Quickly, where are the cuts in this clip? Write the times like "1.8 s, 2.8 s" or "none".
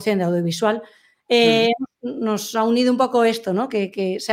none